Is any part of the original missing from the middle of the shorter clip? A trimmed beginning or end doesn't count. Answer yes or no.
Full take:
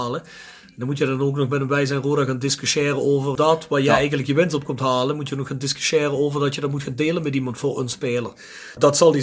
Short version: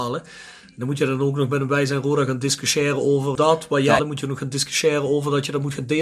yes